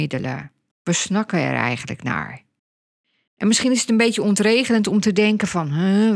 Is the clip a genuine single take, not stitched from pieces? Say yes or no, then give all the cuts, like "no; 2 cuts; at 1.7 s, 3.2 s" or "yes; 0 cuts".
yes; 0 cuts